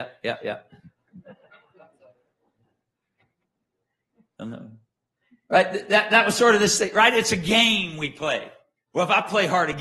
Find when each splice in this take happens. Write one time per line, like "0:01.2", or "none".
none